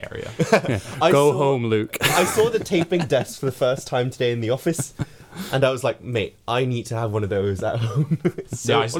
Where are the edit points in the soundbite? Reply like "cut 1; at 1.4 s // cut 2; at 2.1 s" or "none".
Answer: none